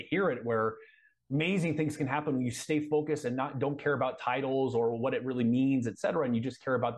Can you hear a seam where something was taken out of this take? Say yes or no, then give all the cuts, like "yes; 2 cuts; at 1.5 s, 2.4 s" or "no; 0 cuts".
no; 0 cuts